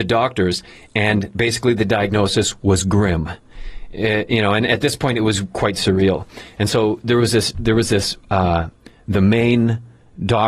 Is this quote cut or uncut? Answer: uncut